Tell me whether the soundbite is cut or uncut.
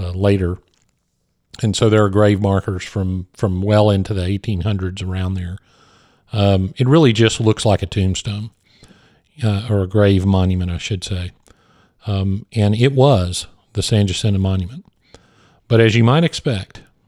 uncut